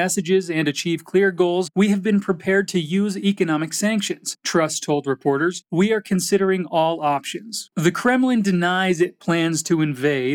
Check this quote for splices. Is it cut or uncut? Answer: cut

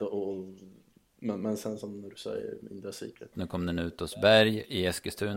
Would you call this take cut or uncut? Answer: cut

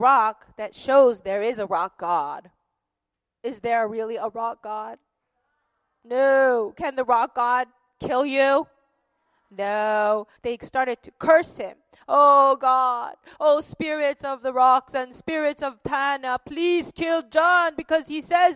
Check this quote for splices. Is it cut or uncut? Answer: cut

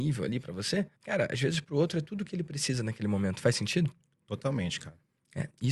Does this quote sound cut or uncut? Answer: cut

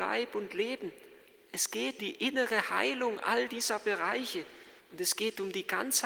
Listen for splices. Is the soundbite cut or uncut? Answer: cut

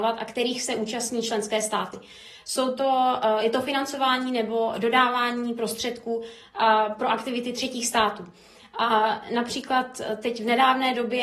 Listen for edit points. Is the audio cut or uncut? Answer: uncut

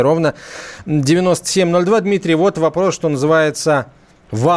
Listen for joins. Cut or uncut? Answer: uncut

